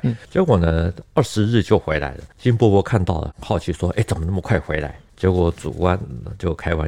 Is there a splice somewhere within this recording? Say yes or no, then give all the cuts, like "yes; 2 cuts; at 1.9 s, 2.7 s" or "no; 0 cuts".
no; 0 cuts